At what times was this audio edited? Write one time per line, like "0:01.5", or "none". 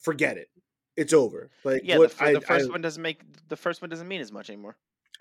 none